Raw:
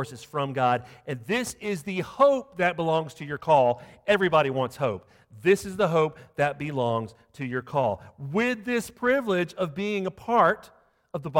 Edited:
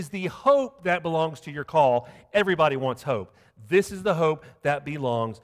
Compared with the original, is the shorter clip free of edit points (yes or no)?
yes